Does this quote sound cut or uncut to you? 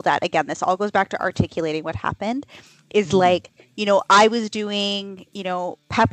uncut